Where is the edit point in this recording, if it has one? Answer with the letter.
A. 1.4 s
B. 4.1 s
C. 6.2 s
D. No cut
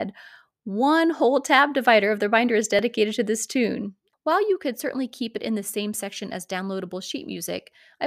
B